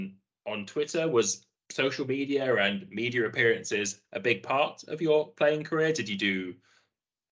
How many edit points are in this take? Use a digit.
0